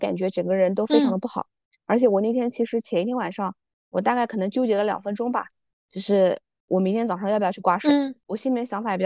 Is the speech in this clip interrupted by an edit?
no; 0 cuts

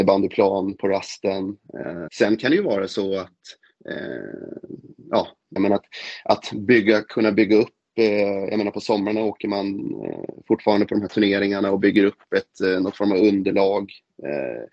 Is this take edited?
yes; 2 cuts; at 2.1 s, 5.6 s

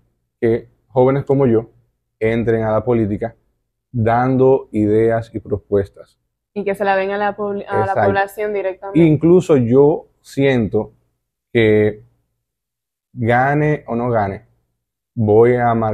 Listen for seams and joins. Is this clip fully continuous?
yes; 0 cuts

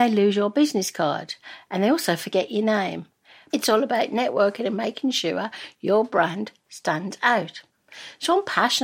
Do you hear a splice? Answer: yes; 1 cut; at 3.5 s

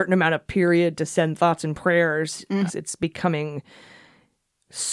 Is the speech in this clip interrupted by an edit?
yes; 1 cut; at 2.7 s

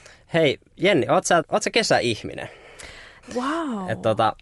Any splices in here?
yes; 2 cuts; at 1.4 s, 3.2 s

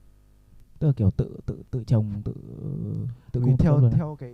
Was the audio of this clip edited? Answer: no; 0 cuts

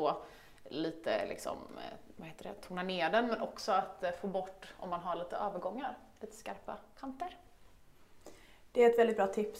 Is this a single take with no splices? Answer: yes; 0 cuts

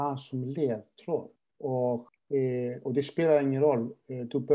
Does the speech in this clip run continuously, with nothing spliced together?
yes; 0 cuts

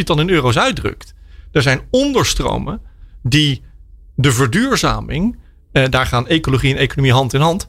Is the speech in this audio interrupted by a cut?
no; 0 cuts

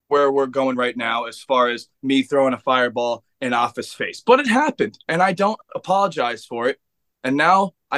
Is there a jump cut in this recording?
no; 0 cuts

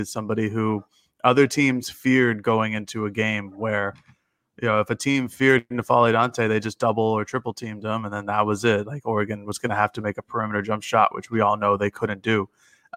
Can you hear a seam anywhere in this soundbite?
no; 0 cuts

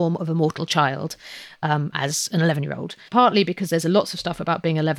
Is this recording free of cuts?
no; 1 cut; at 3.1 s

